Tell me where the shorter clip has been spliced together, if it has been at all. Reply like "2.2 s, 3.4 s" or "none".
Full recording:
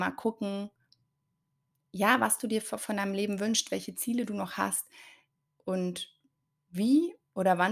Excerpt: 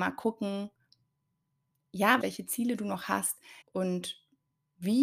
2.2 s, 3.6 s